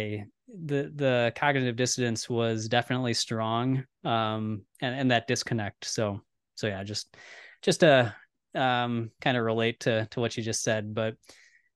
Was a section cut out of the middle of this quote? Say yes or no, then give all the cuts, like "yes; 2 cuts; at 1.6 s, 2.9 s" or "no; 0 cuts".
no; 0 cuts